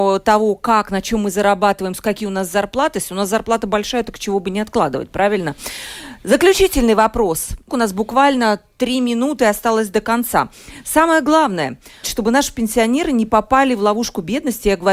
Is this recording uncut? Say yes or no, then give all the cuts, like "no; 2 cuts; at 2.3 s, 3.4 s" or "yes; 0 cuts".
no; 2 cuts; at 7.7 s, 12.0 s